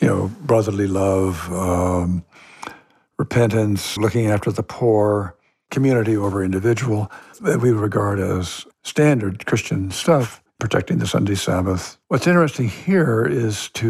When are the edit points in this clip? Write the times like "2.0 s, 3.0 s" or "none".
4.0 s, 10.5 s, 12.0 s